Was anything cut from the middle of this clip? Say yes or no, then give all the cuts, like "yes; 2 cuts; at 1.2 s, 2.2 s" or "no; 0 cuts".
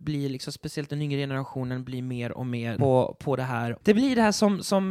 yes; 2 cuts; at 2.8 s, 3.8 s